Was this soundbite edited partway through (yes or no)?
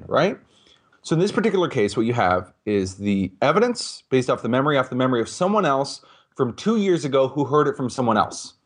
yes